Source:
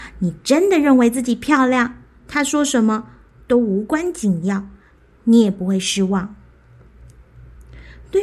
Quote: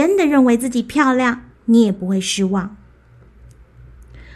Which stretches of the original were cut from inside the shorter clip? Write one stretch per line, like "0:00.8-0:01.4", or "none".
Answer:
0:02.1-0:05.1

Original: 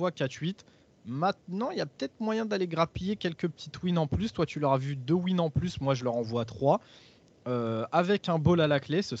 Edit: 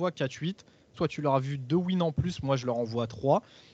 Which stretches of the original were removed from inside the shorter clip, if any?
0:00.9-0:04.3

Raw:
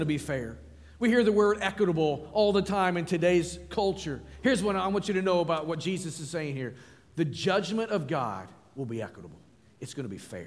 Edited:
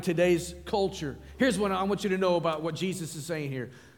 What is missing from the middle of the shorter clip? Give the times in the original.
none

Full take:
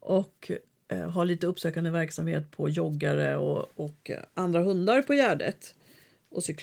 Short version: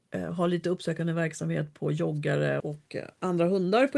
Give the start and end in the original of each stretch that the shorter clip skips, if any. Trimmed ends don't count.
0:03.4-0:03.7

